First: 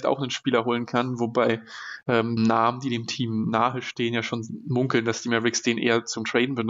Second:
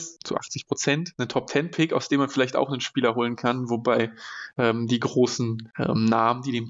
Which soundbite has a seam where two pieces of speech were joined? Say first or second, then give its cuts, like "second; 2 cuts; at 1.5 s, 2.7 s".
first; 1 cut; at 2.4 s